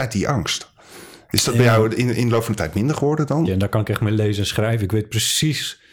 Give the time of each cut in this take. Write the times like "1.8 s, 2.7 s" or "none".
3.5 s